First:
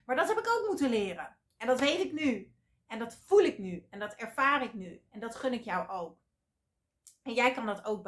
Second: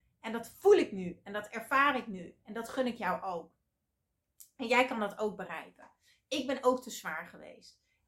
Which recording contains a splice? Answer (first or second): first